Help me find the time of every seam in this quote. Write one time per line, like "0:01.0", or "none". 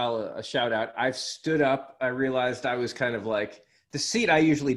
none